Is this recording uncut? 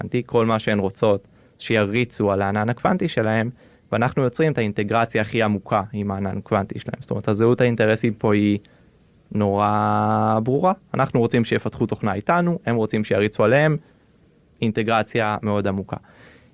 yes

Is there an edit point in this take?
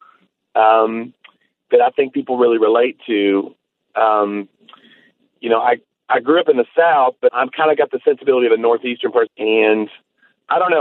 yes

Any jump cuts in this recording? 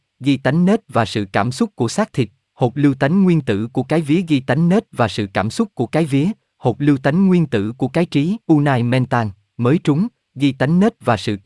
yes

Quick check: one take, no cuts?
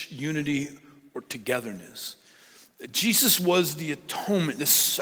yes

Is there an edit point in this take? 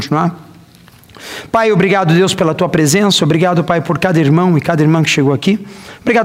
no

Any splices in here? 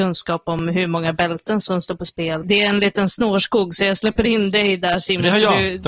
yes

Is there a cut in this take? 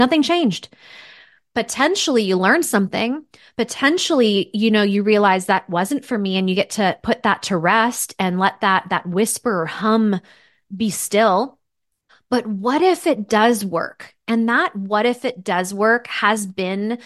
no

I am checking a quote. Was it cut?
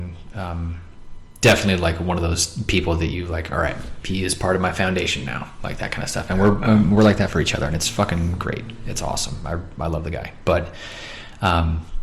no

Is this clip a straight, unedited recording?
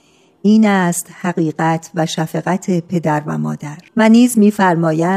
no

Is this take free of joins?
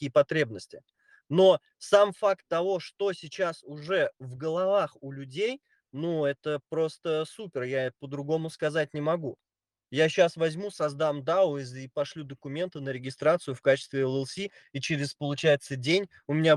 yes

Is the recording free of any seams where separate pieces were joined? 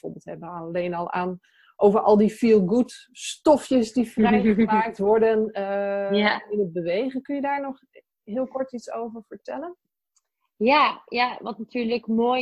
yes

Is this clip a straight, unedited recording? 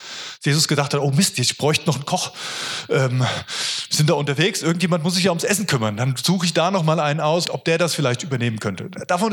no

